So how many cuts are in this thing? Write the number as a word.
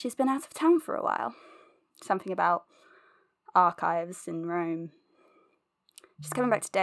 zero